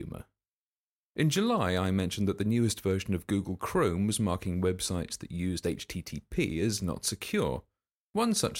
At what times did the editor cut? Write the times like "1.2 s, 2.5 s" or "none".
1.0 s